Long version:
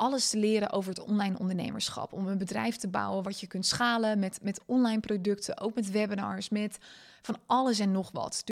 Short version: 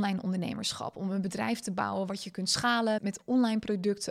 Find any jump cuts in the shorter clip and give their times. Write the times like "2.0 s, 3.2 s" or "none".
3.0 s